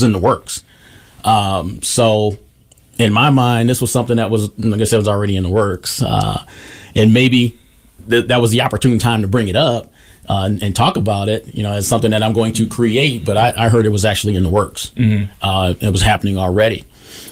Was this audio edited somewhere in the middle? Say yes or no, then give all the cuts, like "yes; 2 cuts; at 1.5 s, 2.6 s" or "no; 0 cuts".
no; 0 cuts